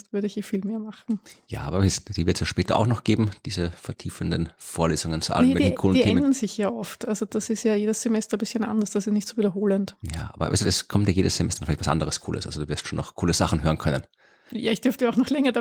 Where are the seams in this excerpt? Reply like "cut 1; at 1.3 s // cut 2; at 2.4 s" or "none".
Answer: none